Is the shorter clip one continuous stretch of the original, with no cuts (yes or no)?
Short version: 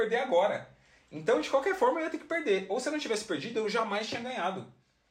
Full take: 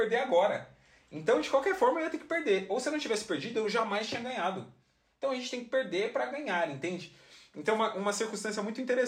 yes